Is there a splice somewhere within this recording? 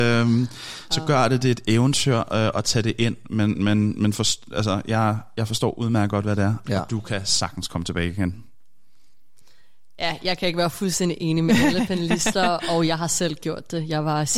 no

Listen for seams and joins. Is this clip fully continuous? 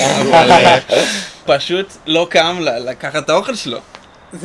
no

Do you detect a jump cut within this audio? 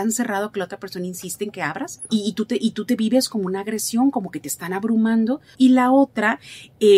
yes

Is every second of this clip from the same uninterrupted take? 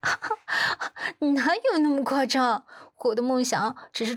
yes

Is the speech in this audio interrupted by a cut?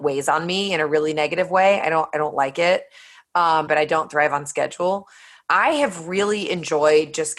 yes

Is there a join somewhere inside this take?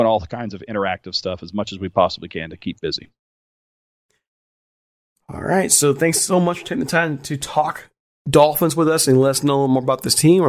no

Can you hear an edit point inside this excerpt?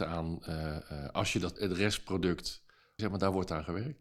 yes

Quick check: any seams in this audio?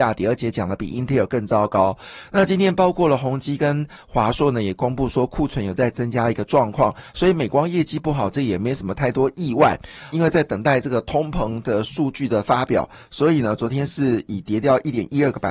yes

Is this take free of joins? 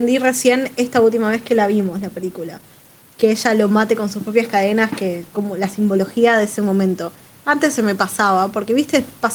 yes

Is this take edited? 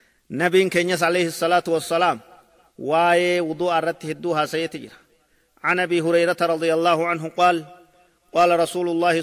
no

